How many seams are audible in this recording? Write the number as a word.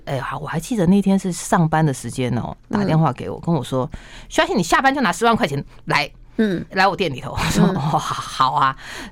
one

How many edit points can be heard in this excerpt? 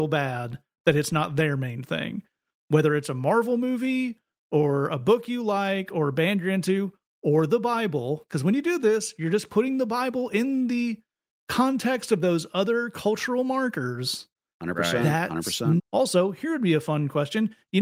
one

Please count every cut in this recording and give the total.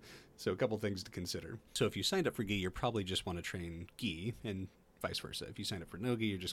one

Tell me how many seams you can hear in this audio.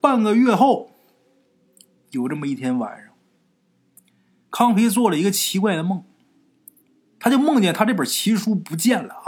zero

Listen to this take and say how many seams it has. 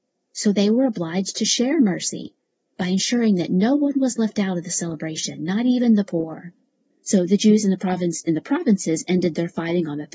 one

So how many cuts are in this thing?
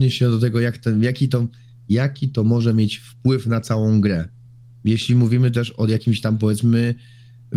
zero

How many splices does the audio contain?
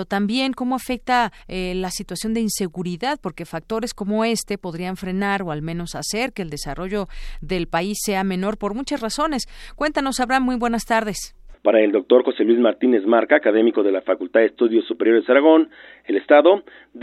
two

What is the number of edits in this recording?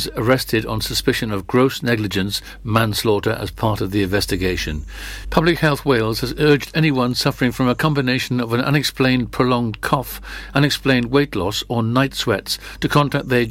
one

